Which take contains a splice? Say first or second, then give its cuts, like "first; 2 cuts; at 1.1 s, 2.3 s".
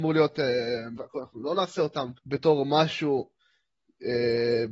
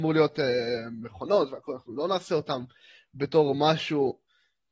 first; 2 cuts; at 1.0 s, 2.2 s